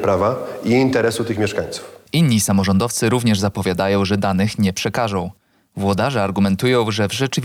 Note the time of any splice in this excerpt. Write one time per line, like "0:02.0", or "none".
0:02.1